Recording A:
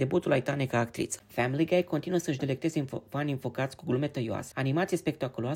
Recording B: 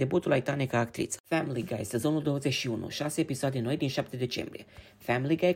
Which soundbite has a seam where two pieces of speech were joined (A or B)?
A